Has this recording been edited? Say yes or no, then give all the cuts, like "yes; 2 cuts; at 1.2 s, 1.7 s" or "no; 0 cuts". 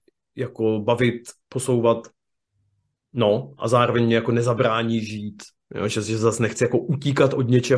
no; 0 cuts